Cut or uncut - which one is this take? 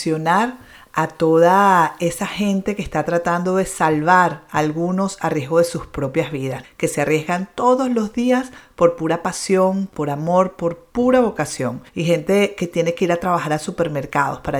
cut